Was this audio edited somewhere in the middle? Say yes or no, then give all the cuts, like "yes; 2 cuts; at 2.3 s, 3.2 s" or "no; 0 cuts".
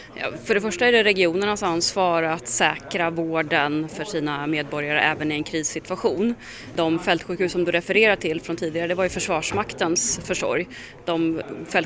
no; 0 cuts